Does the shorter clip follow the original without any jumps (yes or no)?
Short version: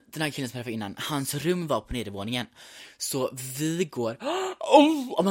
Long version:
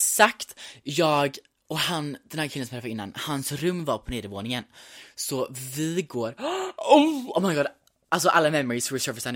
yes